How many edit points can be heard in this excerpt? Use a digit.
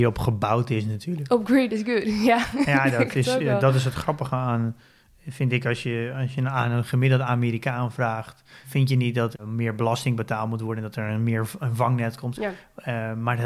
2